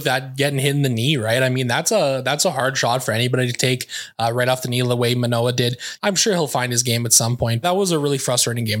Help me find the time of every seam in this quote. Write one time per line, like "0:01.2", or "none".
0:06.0
0:07.6